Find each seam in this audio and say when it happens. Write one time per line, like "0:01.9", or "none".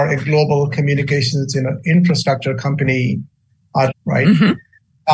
0:03.9